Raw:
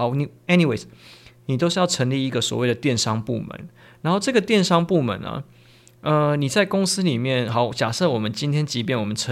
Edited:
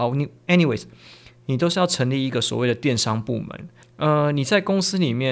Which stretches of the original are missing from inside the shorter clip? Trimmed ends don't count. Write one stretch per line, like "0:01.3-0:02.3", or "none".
0:03.8-0:05.9